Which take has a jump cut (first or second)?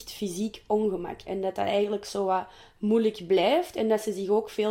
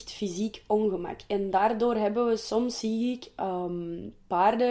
first